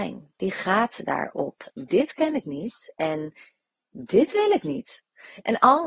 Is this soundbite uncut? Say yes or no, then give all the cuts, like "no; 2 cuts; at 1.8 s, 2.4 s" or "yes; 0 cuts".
no; 1 cut; at 1.7 s